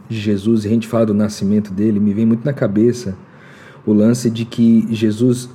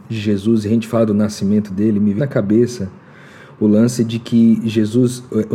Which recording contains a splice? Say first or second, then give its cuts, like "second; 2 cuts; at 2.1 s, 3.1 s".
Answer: second; 1 cut; at 2.2 s